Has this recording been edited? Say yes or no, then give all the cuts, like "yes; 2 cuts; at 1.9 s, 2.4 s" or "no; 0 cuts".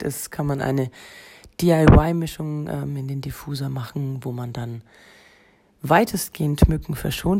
no; 0 cuts